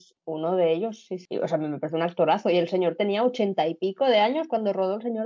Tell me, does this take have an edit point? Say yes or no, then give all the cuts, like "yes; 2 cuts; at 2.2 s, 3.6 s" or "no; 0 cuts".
no; 0 cuts